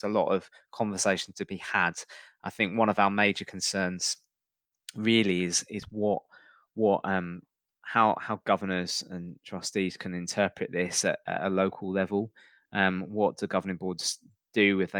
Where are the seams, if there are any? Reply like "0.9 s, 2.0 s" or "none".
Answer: none